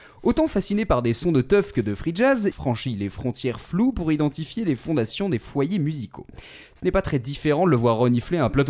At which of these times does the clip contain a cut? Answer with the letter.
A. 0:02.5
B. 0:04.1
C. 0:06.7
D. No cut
A